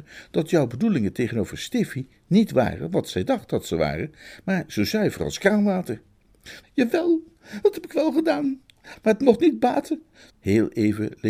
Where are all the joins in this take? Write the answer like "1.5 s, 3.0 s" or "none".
6.6 s, 9.0 s, 10.3 s

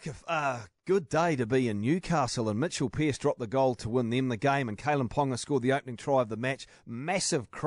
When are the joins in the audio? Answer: none

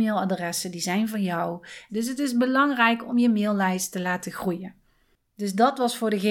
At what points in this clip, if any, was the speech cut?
1.9 s

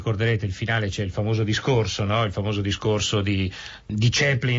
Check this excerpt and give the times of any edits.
none

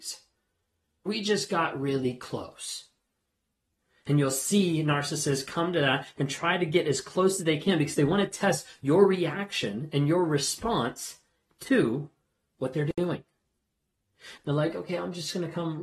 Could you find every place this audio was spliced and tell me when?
1.1 s, 14.4 s

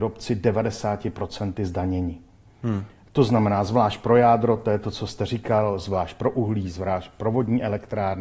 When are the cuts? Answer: none

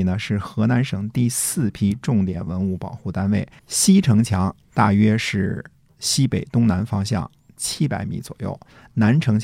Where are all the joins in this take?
3.6 s

